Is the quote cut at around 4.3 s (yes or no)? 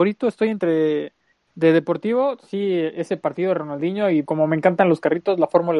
yes